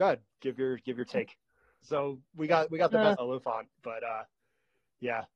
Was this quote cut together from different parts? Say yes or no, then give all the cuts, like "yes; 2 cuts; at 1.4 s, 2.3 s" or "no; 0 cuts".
yes; 2 cuts; at 1.8 s, 3.1 s